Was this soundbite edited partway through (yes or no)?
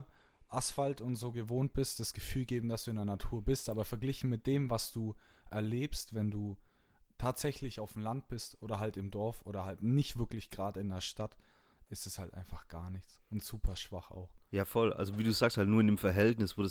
no